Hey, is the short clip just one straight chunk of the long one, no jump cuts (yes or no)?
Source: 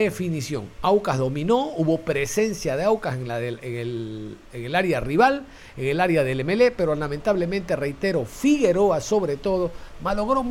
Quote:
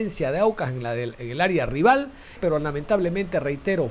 no